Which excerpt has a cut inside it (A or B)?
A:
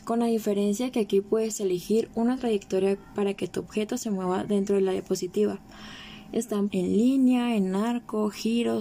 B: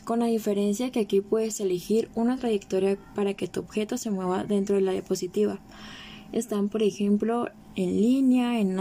A